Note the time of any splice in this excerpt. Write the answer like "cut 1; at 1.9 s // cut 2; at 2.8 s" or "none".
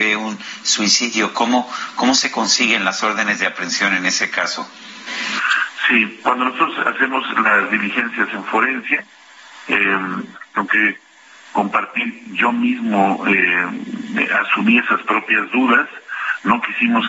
cut 1; at 6.2 s // cut 2; at 10.3 s